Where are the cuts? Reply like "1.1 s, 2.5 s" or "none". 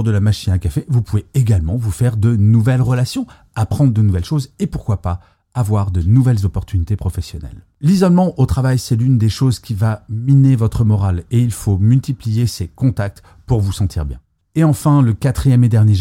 none